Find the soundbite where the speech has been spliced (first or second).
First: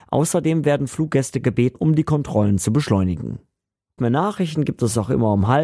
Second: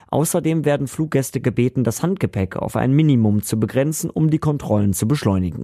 first